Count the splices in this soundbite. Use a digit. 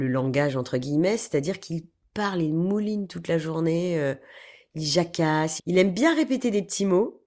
1